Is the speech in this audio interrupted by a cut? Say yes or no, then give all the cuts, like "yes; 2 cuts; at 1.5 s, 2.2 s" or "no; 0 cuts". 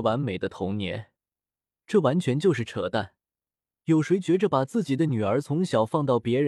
no; 0 cuts